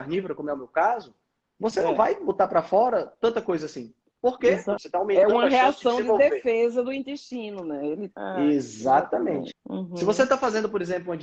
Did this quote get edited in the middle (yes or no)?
yes